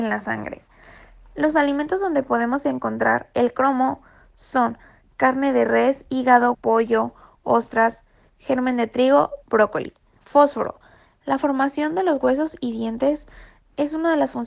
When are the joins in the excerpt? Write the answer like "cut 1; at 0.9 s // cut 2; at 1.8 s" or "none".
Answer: cut 1; at 6.5 s // cut 2; at 10.2 s